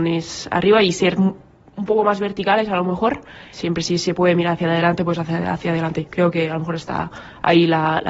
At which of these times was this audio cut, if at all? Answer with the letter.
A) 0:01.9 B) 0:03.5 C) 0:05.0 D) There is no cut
B